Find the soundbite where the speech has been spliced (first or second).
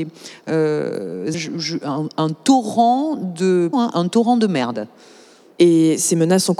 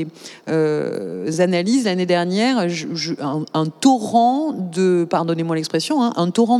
first